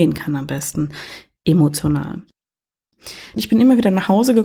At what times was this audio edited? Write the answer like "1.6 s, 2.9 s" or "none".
3.4 s